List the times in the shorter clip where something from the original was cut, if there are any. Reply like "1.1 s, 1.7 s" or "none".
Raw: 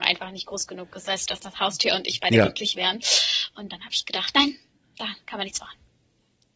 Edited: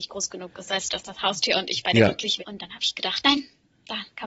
2.4 s